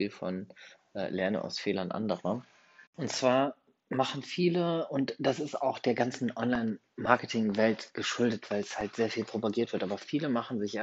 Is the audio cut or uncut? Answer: cut